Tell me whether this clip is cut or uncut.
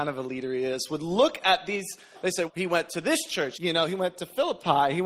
cut